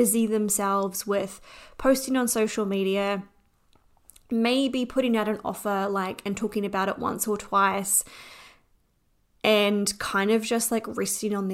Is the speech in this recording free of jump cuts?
yes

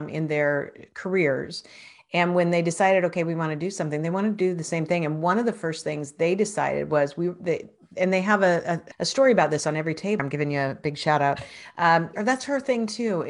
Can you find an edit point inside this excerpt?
yes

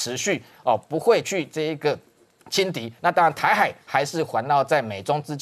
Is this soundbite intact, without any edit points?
no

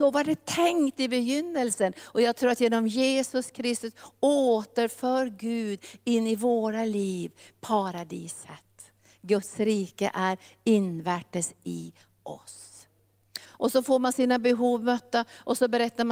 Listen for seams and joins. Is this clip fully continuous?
no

